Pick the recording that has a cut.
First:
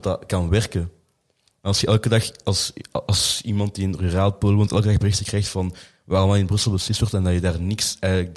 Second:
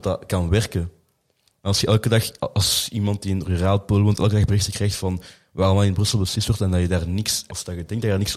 second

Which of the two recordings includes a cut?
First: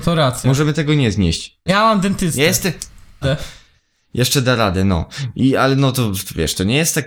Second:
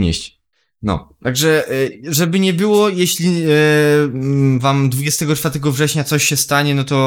first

